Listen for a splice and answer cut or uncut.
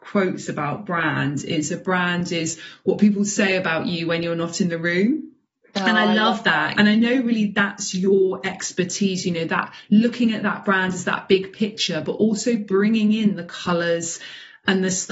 cut